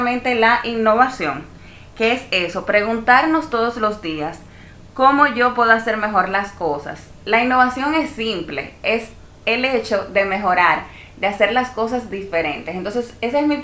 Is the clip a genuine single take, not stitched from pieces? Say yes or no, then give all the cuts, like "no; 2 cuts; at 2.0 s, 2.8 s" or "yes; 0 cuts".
yes; 0 cuts